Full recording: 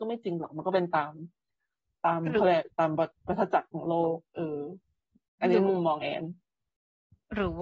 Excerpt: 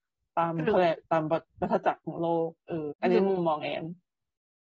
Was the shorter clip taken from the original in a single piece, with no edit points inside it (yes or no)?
no